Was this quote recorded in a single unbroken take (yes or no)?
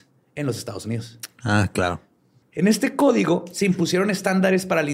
no